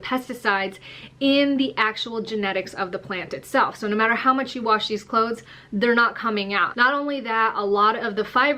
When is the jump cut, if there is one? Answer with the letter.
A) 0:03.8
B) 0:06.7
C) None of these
B